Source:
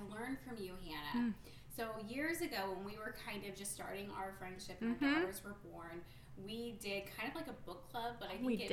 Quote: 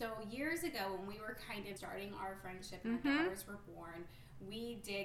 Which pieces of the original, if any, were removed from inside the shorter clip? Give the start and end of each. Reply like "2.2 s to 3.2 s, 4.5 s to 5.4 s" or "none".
3.5 s to 3.7 s